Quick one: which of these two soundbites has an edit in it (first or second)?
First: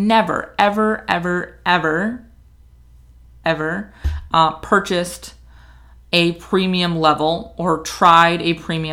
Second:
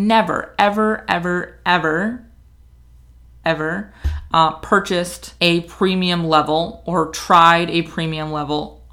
second